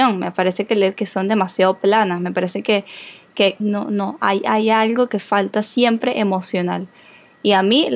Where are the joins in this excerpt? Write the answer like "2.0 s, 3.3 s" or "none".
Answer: 3.6 s